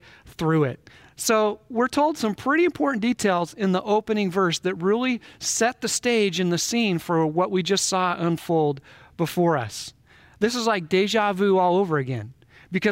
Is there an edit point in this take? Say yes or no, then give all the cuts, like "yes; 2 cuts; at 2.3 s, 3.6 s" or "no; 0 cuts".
no; 0 cuts